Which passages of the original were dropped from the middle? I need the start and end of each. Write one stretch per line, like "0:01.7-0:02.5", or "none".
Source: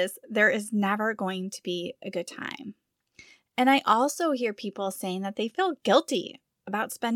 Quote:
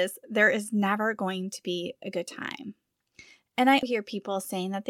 0:03.8-0:04.3